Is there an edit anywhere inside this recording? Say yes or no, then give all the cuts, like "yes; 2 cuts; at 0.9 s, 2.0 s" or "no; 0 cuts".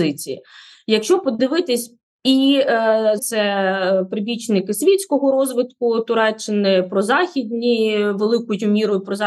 yes; 2 cuts; at 2.1 s, 3.2 s